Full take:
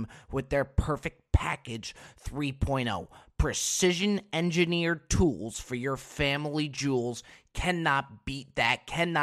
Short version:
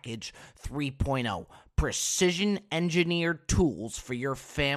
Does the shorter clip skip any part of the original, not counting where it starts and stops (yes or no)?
no